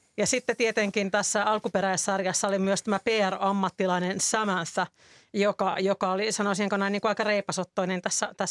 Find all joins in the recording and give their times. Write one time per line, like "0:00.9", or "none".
none